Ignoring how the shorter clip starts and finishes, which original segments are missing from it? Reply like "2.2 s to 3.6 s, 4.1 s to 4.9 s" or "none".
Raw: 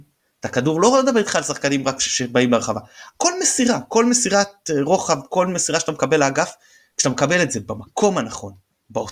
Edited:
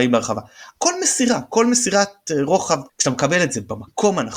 5.3 s to 6.9 s